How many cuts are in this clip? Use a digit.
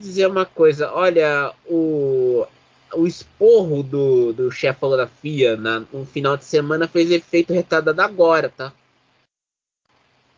1